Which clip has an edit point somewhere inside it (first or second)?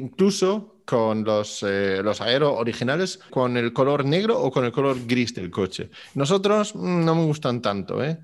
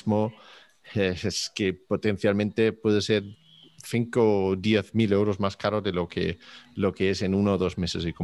first